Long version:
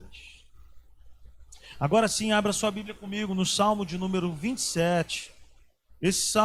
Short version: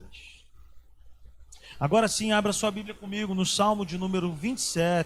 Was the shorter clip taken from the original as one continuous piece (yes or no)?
yes